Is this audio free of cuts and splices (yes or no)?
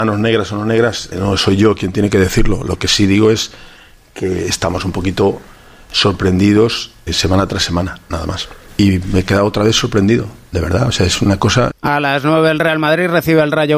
no